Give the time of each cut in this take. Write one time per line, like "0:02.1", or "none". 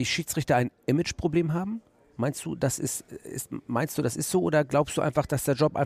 none